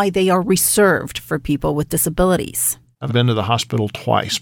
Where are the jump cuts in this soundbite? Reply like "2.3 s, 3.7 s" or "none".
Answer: 3.1 s

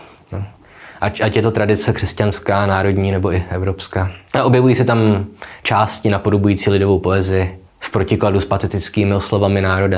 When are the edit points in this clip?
4.3 s, 7.7 s

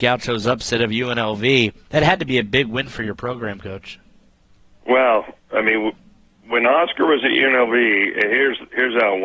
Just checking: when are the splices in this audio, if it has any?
none

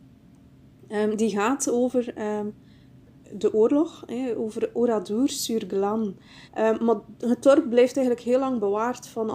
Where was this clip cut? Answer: 6.5 s

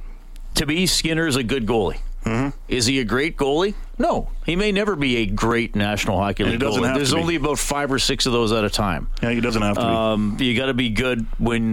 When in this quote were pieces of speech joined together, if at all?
none

